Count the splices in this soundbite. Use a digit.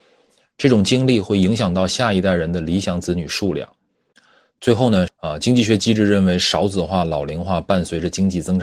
1